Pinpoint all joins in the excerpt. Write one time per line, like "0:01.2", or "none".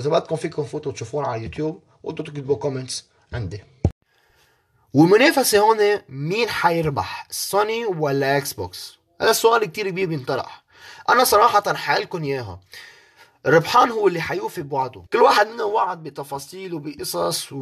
0:15.1